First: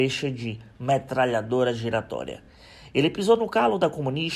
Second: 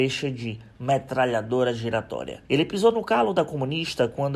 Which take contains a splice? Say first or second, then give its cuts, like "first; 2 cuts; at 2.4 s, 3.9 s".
second; 1 cut; at 2.4 s